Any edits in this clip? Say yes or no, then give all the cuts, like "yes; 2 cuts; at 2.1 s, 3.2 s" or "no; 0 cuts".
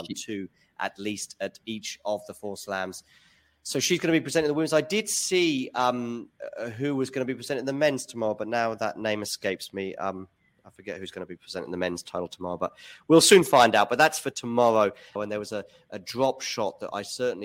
yes; 1 cut; at 15.2 s